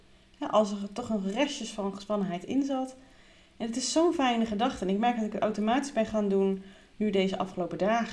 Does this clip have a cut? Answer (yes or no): no